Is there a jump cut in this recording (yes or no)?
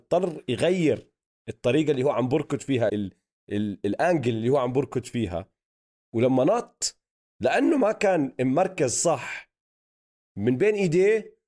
yes